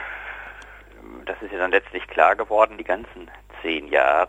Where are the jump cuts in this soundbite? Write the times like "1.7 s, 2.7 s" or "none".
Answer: 2.8 s